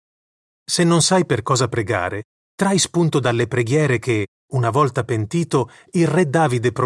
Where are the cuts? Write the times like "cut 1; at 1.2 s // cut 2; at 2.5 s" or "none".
none